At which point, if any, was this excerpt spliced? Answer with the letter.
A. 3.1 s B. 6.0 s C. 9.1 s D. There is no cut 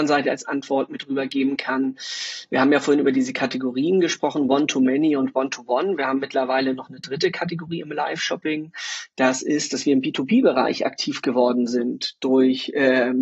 D